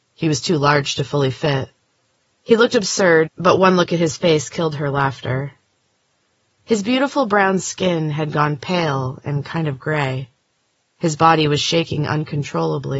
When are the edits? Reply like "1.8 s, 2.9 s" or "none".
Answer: 3.3 s